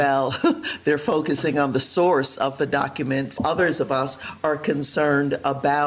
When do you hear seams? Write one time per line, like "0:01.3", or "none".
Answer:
0:03.4